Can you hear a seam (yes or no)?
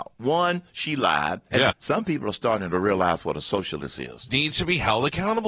yes